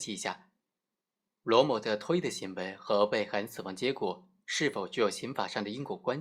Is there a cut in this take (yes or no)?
no